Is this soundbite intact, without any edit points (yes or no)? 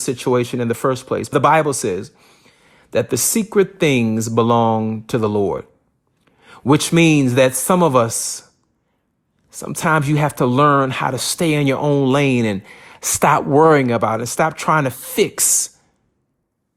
no